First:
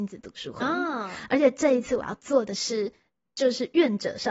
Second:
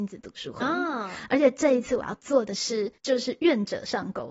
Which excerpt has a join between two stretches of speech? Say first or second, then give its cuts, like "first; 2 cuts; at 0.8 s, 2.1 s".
second; 1 cut; at 3.0 s